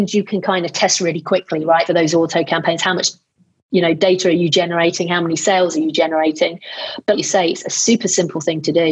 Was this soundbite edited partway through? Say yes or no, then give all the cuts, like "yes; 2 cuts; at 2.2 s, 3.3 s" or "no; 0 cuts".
yes; 2 cuts; at 1.9 s, 7.1 s